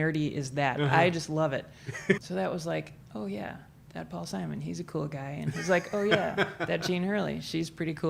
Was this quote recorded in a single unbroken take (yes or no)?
no